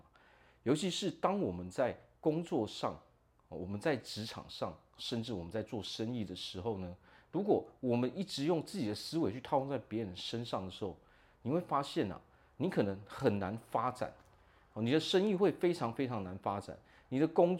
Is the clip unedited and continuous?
yes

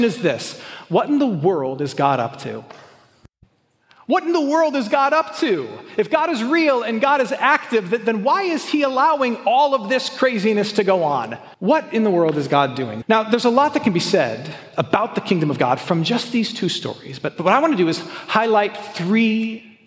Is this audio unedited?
no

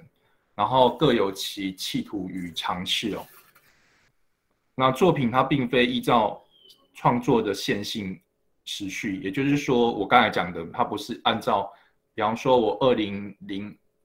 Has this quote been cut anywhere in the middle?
no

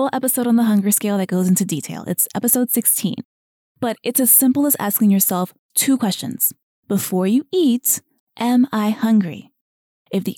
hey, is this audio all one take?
no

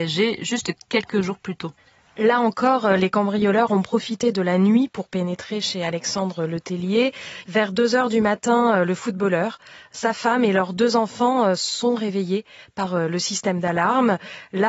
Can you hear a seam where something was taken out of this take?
yes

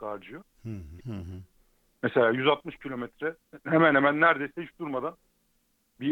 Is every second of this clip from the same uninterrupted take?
no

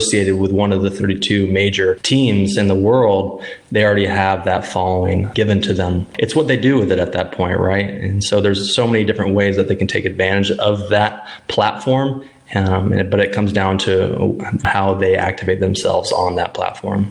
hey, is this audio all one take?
yes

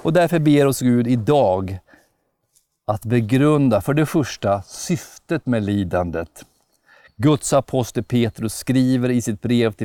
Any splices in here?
no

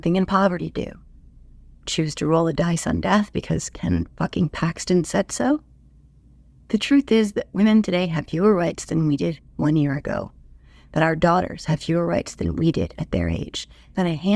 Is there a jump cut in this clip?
no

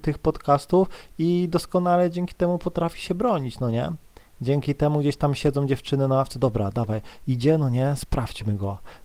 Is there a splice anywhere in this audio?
no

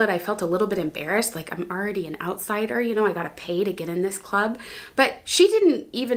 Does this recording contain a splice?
no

